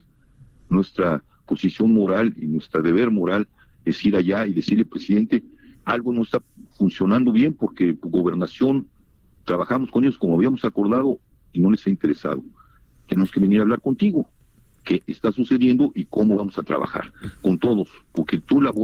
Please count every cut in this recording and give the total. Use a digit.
1